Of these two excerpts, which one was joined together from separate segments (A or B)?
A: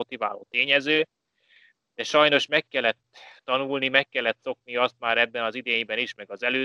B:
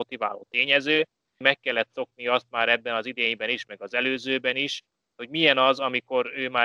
B